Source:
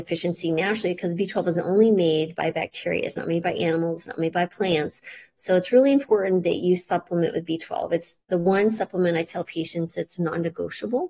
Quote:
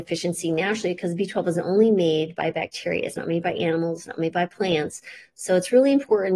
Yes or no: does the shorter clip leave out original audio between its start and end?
no